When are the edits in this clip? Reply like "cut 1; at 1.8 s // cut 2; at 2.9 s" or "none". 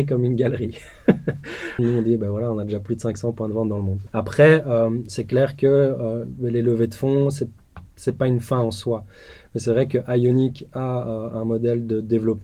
cut 1; at 1.8 s // cut 2; at 4.1 s